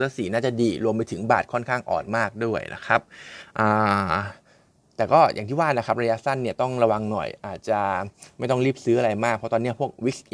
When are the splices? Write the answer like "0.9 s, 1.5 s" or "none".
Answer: 7.6 s